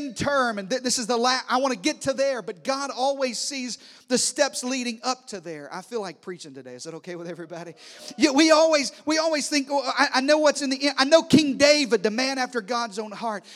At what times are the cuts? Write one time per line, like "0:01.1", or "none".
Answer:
none